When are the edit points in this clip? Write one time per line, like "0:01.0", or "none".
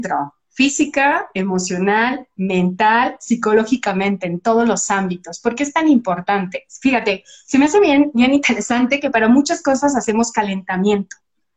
none